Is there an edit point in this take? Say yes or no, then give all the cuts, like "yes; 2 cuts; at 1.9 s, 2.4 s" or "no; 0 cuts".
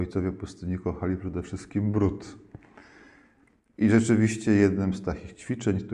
no; 0 cuts